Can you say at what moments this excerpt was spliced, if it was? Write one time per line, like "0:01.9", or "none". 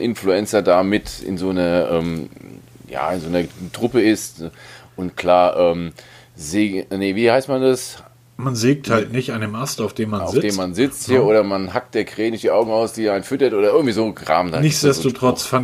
none